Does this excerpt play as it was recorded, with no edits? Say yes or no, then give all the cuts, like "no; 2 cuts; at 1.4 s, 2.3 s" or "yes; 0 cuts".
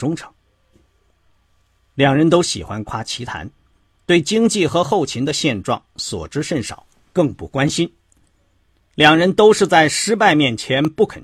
no; 1 cut; at 2.8 s